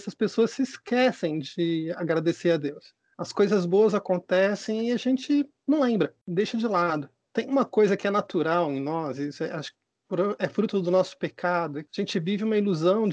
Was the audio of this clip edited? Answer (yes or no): no